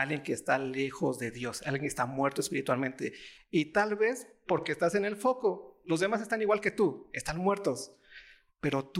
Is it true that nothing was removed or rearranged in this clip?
yes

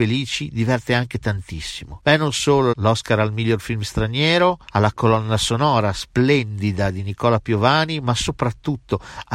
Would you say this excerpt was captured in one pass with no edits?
no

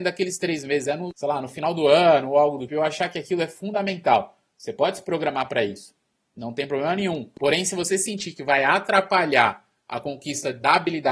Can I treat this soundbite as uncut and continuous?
no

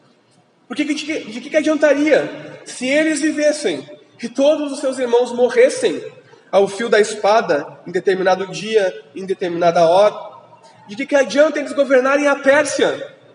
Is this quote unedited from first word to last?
yes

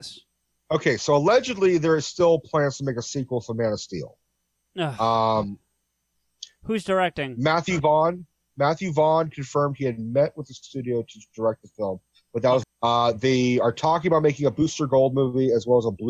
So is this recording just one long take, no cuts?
no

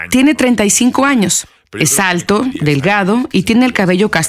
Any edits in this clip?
no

